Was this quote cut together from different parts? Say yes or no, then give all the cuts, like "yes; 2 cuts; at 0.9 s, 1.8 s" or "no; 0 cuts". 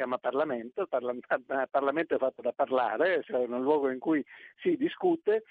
no; 0 cuts